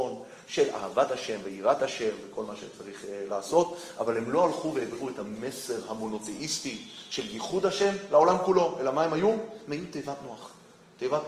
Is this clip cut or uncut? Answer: uncut